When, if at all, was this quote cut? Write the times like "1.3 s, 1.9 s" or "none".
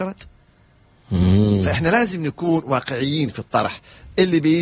none